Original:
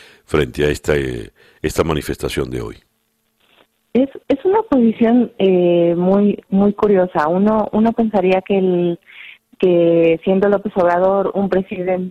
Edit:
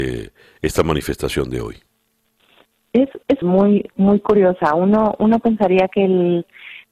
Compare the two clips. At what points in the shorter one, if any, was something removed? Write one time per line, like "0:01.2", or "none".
0:03.4